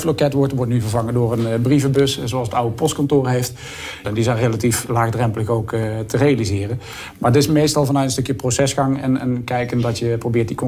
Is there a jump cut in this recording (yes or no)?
yes